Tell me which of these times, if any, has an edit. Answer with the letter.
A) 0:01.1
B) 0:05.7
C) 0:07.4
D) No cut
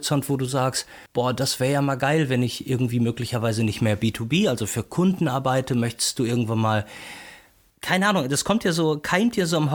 A